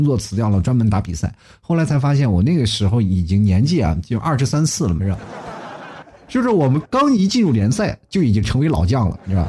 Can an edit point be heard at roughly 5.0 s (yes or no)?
yes